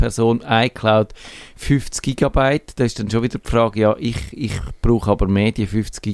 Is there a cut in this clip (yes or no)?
no